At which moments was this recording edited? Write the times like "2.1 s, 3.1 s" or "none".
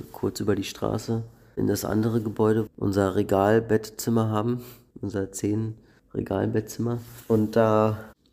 2.7 s

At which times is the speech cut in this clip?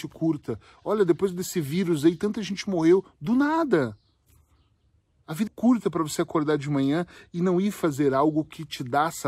5.5 s

